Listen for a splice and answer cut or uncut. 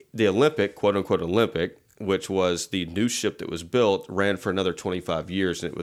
uncut